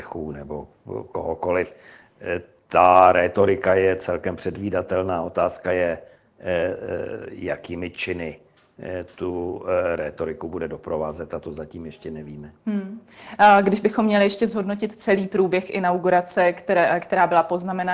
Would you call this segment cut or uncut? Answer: uncut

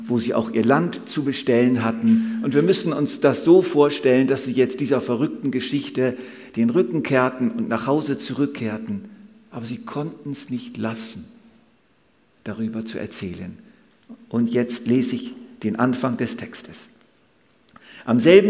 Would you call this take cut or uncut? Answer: uncut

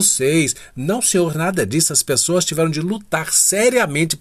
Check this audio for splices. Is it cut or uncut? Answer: uncut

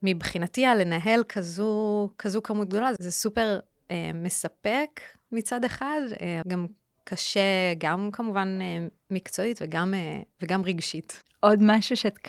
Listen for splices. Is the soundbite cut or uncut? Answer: cut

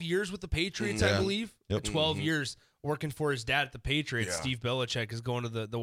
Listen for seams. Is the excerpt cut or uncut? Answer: uncut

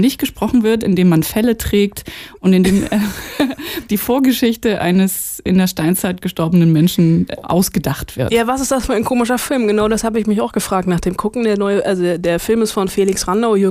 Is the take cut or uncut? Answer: cut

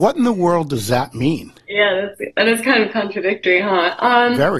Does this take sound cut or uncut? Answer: uncut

